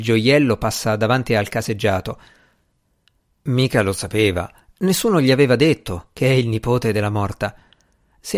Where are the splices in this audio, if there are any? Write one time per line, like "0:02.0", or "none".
0:03.3

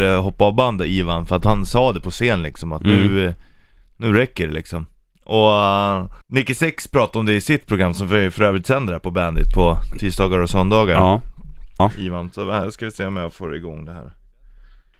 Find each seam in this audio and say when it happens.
0:06.2
0:11.8

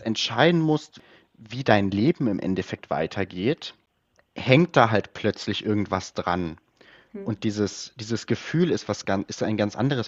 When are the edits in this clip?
none

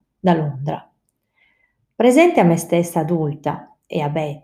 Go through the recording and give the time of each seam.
none

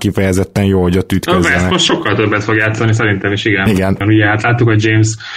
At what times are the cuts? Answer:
0:04.0

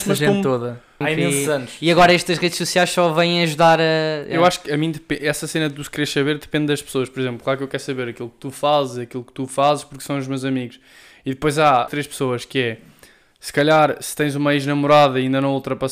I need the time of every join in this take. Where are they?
0:01.0
0:11.9

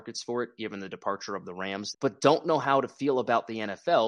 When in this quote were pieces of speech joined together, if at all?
0:01.9

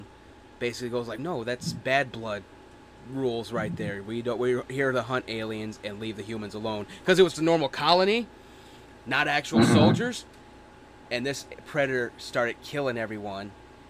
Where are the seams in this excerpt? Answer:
0:01.2
0:07.3

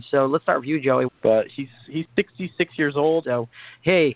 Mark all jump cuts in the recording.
0:01.1
0:03.2

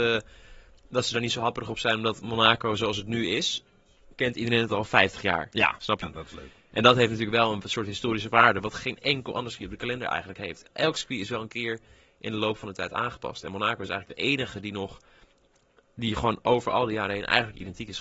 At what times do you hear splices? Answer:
0:06.0

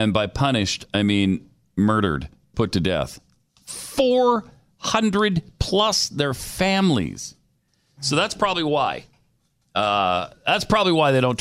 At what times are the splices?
0:02.5

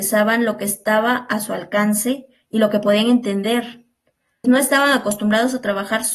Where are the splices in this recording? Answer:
0:04.4

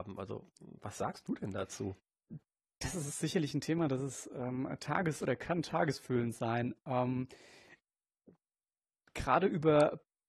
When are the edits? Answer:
none

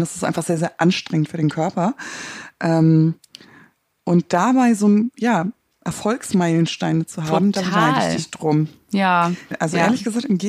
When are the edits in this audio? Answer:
0:05.1
0:09.5

